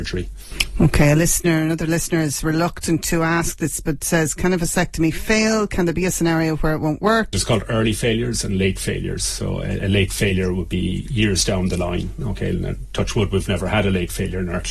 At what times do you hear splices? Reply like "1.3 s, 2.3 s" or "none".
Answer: 7.3 s